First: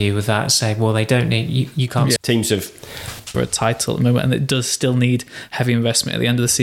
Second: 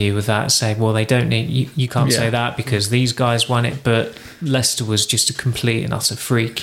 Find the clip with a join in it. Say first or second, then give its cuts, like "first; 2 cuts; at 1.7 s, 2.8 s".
first; 2 cuts; at 2.2 s, 3.3 s